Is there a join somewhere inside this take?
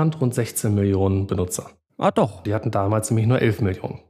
yes; 1 cut; at 2.4 s

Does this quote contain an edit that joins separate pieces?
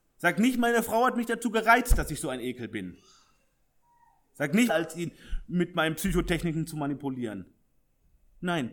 yes; 1 cut; at 4.7 s

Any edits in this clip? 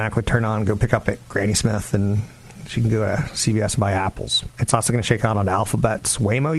yes; 1 cut; at 4.5 s

